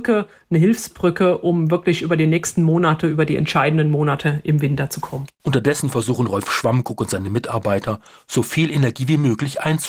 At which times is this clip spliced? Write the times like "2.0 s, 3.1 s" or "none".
none